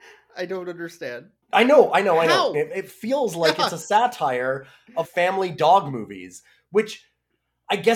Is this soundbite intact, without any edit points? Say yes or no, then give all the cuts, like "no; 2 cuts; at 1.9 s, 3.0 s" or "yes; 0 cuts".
no; 3 cuts; at 1.4 s, 2.5 s, 5.0 s